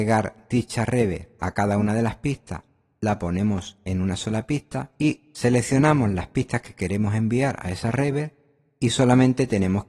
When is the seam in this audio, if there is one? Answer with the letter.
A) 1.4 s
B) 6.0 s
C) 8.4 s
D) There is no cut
D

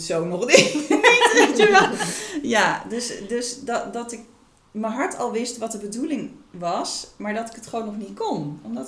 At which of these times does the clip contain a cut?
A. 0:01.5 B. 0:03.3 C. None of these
C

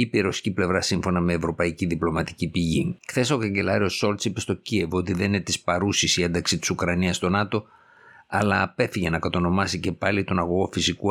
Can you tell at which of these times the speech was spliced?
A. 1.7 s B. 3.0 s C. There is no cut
B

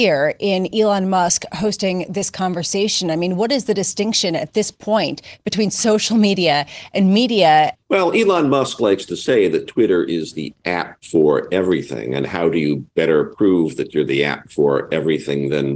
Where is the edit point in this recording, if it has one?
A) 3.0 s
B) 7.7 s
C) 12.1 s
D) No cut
B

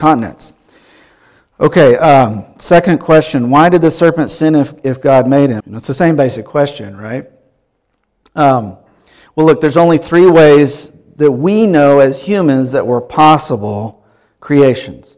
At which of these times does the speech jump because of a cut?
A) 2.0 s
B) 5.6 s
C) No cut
B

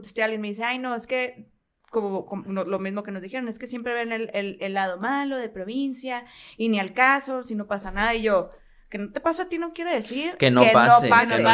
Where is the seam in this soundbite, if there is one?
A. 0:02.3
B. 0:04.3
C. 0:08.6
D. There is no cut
D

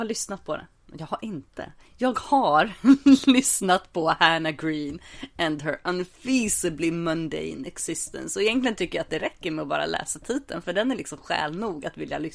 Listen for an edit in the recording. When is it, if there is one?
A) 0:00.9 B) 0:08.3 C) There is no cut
C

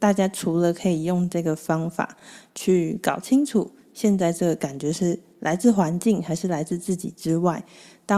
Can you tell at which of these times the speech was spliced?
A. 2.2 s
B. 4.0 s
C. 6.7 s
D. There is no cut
D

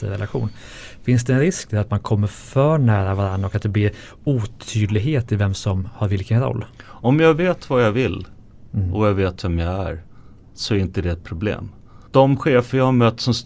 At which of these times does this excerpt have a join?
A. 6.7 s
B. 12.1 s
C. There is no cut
B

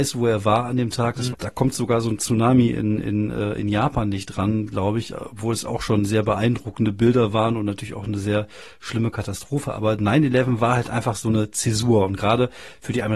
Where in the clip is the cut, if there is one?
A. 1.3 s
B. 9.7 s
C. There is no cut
A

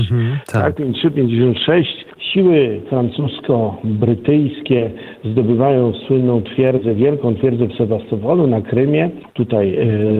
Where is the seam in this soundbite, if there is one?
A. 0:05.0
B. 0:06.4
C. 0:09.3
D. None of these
C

